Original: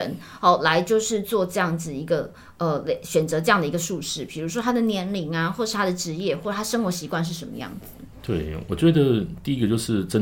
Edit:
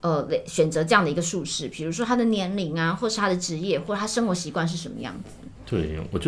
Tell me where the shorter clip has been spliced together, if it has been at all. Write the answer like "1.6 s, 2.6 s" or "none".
none